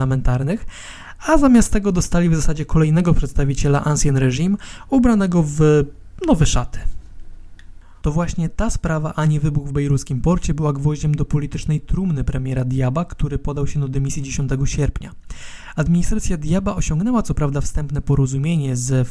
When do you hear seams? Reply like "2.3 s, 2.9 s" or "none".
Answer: 8.0 s